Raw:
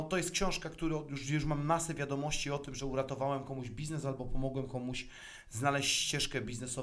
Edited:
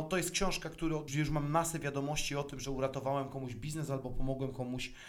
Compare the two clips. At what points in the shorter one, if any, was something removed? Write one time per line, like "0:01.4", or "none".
0:01.1